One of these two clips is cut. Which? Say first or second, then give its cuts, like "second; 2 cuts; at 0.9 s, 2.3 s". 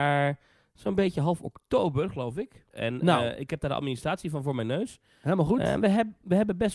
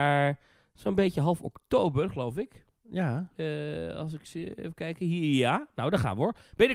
first; 1 cut; at 2.7 s